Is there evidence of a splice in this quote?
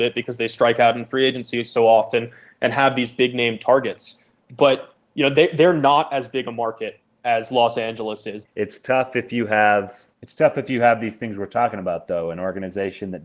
yes; 2 cuts; at 8.4 s, 10.1 s

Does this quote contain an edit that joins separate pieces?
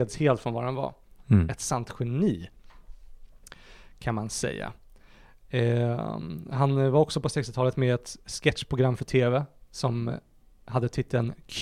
no; 0 cuts

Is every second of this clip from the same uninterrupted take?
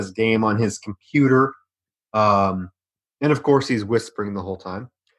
yes; 0 cuts

